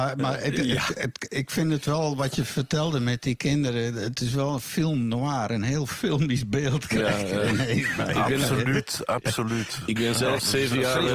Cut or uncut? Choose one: uncut